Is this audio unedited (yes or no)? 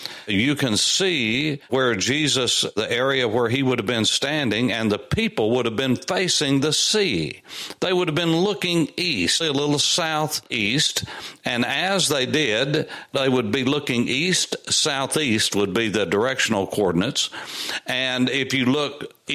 no